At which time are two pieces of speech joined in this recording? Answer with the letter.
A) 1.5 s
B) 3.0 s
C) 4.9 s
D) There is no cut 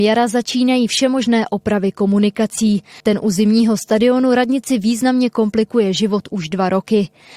B